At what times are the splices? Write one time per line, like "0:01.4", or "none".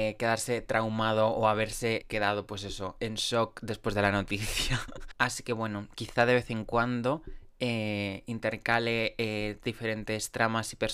0:02.0
0:05.1